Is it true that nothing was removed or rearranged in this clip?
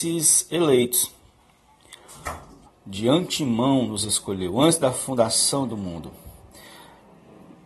no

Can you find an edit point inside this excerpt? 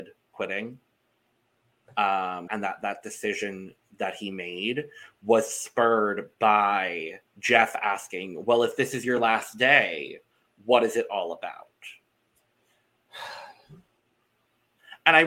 yes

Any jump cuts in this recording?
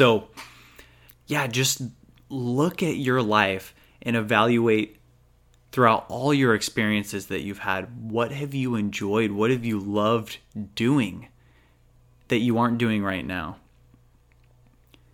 yes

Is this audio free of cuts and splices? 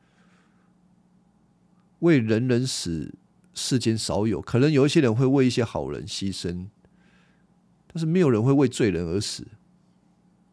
yes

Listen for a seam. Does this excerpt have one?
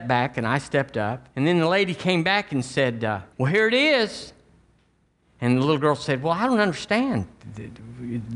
yes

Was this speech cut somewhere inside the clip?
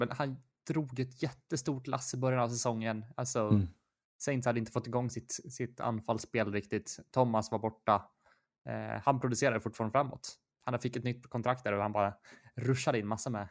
no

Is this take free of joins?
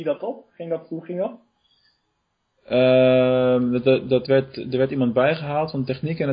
yes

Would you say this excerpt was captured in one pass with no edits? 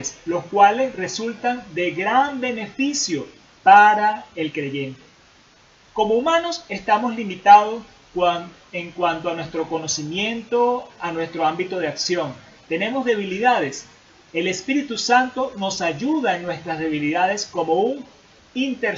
yes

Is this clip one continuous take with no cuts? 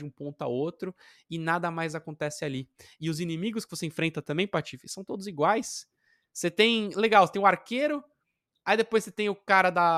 yes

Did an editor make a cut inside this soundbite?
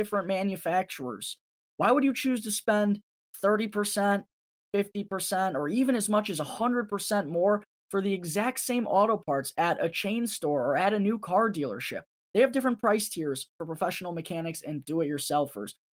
yes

